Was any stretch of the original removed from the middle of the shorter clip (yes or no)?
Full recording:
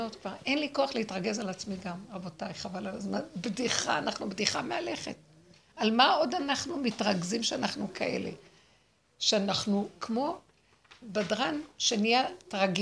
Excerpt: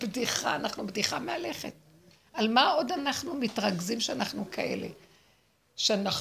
no